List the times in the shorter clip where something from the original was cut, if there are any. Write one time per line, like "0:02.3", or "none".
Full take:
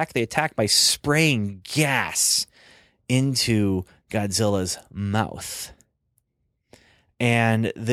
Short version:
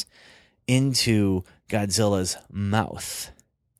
none